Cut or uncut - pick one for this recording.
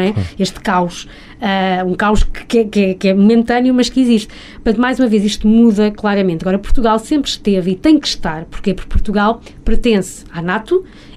uncut